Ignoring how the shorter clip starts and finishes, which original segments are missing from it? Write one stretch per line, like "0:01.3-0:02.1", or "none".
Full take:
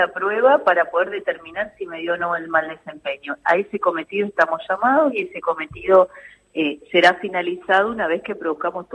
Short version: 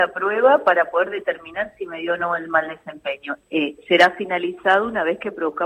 0:03.4-0:06.4